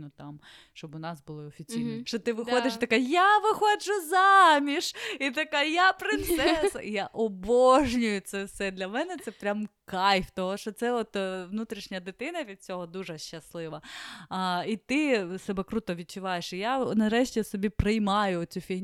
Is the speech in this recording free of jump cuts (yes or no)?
no